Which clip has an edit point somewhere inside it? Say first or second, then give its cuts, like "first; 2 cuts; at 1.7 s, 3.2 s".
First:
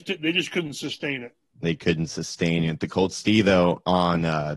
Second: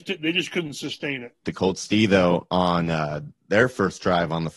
second; 1 cut; at 1.4 s